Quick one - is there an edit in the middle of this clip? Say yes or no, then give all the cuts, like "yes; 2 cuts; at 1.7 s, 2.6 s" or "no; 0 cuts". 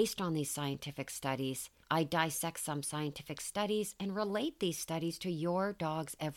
yes; 1 cut; at 1.8 s